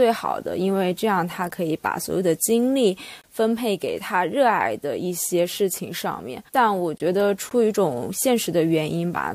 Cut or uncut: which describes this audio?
cut